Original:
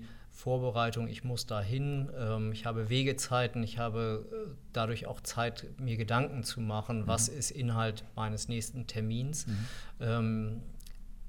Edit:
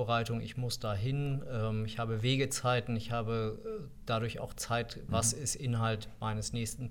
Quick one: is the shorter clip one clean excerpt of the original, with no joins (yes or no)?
no